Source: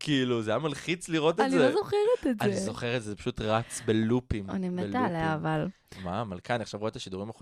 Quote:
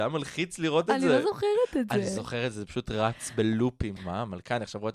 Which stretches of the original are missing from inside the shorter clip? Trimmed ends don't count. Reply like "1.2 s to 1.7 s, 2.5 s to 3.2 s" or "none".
4.5 s to 5.9 s